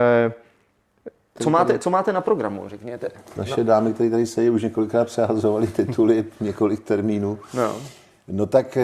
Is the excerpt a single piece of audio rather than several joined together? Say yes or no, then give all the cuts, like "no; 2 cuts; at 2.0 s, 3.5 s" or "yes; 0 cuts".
no; 1 cut; at 1.4 s